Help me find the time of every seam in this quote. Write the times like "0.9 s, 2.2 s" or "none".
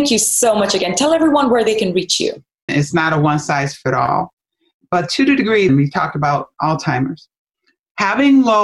2.7 s, 5.7 s